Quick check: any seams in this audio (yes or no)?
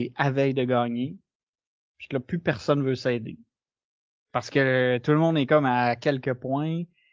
no